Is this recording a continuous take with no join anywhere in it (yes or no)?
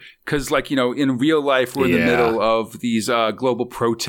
yes